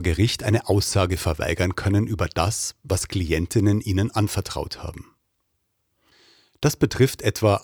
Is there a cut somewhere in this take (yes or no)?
no